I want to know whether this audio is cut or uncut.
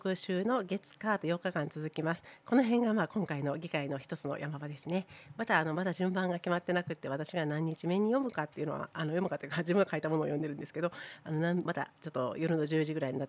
cut